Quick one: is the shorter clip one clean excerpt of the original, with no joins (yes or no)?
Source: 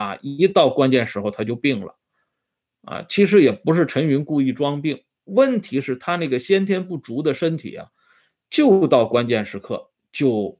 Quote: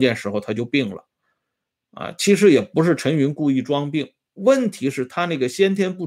yes